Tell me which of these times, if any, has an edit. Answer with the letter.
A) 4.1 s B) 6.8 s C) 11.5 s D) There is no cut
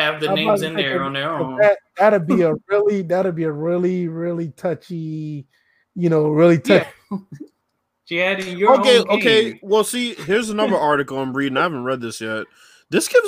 B